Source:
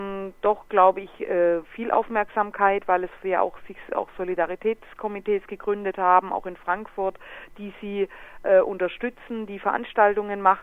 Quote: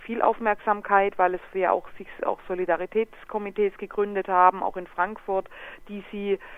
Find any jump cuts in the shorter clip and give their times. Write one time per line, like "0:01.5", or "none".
none